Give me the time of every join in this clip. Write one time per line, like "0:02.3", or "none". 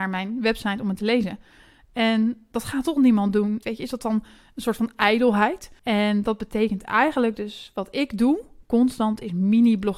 0:03.6
0:05.8